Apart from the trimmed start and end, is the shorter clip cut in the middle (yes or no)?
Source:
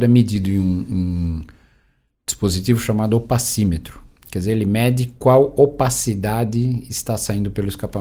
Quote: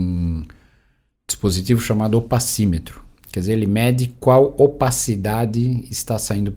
no